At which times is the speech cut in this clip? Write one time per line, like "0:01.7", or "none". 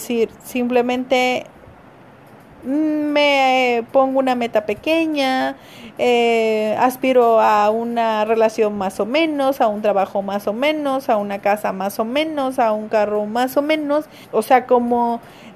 0:14.2

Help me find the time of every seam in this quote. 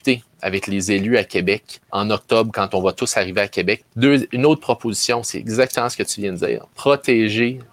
0:01.9
0:03.8

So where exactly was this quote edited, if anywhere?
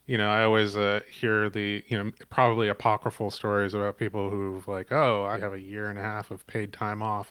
0:05.3

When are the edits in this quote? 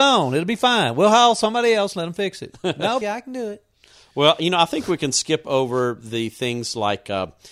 0:03.0

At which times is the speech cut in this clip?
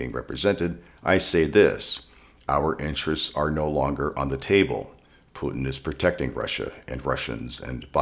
none

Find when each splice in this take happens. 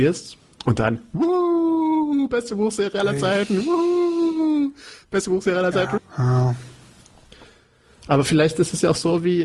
0:06.0

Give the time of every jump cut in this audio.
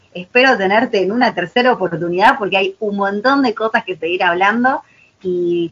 none

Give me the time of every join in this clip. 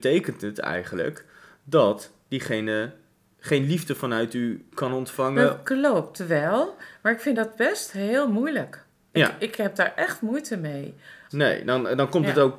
0:11.3

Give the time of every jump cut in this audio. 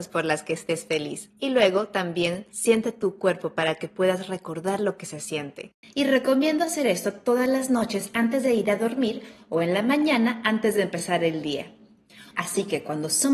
0:05.8
0:12.3

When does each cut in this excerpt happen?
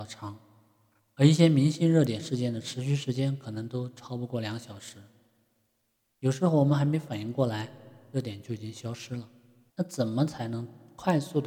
0:09.7

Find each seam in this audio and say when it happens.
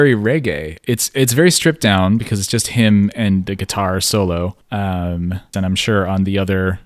0:05.5

